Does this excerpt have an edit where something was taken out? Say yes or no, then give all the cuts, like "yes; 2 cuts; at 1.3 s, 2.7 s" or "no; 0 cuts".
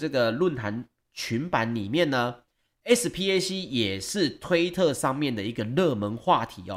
no; 0 cuts